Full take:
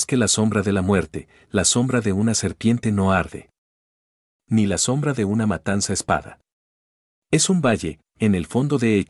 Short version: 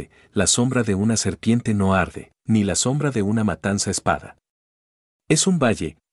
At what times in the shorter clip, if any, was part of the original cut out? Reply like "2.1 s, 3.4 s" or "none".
2.4 s